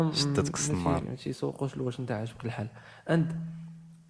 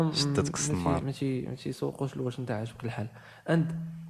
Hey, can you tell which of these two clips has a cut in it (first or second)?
first